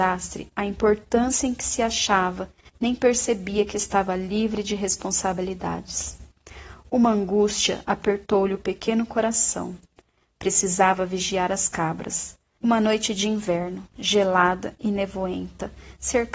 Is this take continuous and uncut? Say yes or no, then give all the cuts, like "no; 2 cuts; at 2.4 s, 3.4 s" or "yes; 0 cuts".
no; 1 cut; at 12.6 s